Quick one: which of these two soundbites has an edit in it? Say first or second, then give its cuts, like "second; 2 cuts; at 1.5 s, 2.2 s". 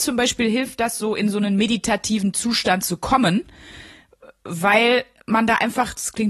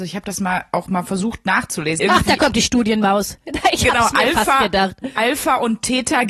second; 1 cut; at 2.0 s